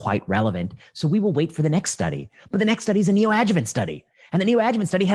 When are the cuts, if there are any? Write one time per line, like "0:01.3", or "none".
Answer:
none